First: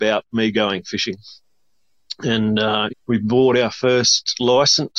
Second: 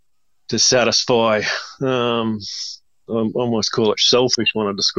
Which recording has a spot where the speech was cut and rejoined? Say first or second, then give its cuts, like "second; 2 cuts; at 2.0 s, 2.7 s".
first; 1 cut; at 2.9 s